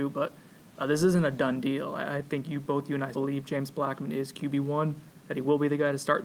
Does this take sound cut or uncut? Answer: cut